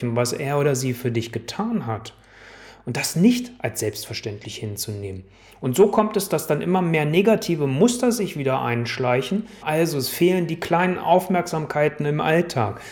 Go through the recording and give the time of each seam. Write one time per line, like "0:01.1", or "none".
0:09.6

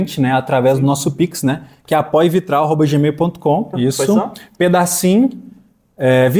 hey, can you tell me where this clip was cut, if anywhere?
0:03.7

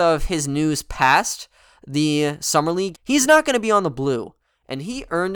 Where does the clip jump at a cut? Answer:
0:02.9

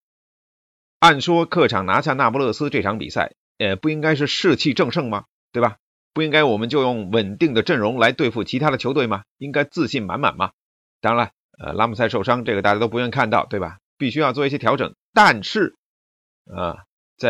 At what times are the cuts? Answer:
none

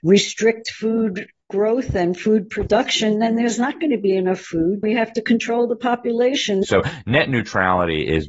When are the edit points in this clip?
0:04.8
0:06.6

